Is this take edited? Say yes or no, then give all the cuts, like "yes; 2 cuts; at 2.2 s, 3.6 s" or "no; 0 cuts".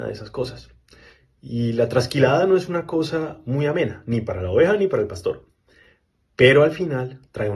no; 0 cuts